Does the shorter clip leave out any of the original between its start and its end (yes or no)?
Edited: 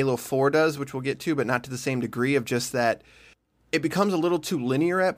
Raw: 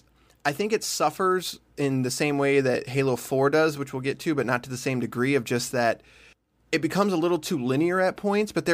no